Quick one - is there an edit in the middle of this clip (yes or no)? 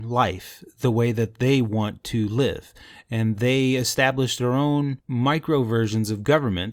no